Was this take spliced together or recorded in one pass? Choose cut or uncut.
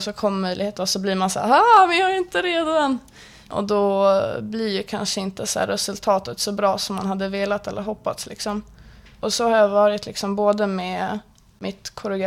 uncut